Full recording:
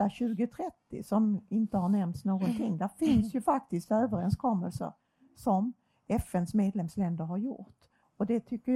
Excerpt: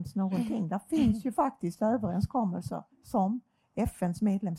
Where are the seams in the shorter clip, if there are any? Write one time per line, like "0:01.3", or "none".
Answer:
0:02.9